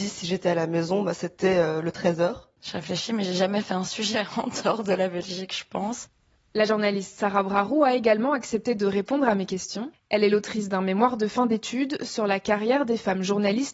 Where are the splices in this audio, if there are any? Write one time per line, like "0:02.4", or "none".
0:02.6